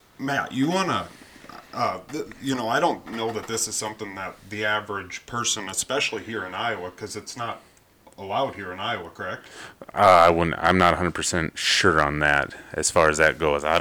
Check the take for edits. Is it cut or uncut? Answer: uncut